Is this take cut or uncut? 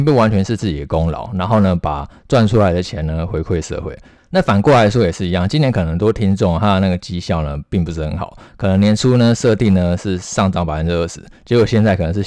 uncut